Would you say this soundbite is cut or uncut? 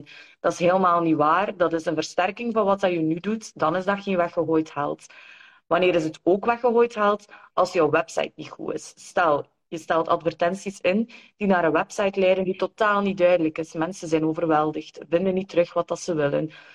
uncut